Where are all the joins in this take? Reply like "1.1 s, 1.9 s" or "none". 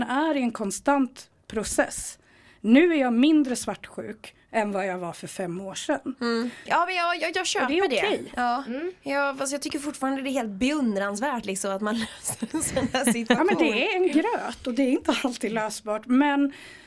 6.7 s